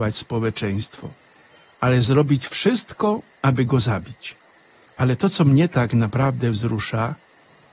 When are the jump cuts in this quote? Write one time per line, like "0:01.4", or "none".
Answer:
0:04.9